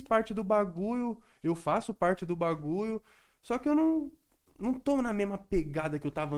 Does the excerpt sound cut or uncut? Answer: uncut